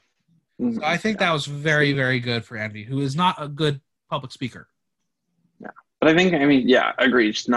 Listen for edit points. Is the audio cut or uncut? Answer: uncut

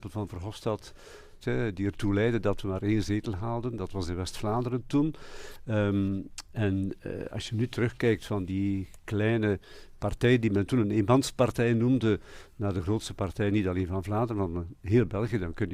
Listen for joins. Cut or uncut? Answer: cut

